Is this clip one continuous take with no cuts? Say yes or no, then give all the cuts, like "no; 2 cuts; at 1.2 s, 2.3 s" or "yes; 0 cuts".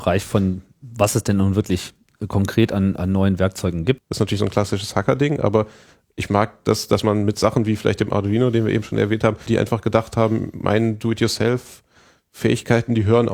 no; 2 cuts; at 4.0 s, 9.5 s